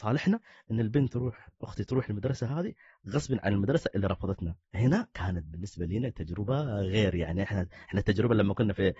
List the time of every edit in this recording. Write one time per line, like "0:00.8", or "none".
0:03.4
0:04.6